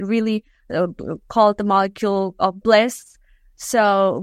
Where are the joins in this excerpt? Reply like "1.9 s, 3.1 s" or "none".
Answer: none

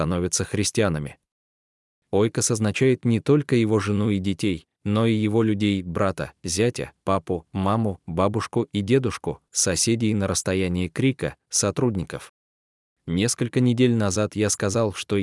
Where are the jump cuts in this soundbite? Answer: 9.5 s, 12.9 s

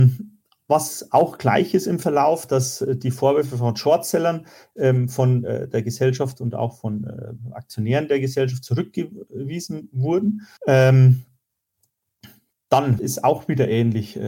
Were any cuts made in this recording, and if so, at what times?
10.6 s, 13.0 s

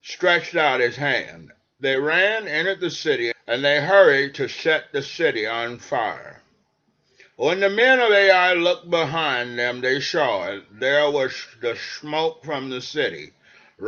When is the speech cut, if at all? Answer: 3.3 s

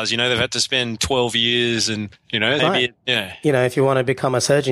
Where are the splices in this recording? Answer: 2.6 s

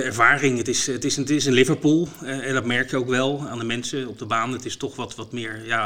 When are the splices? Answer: 3.5 s

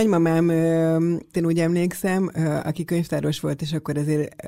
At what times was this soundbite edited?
1.3 s

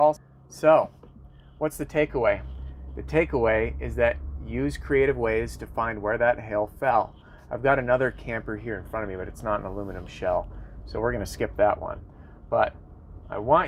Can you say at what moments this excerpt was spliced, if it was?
none

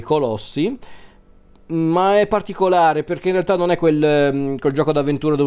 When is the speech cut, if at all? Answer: none

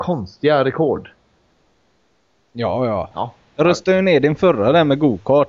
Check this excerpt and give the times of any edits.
3.1 s

